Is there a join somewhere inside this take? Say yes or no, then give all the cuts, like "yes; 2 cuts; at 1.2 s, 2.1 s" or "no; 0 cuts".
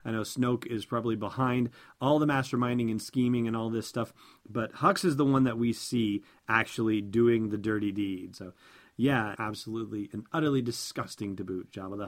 yes; 2 cuts; at 8.3 s, 9.3 s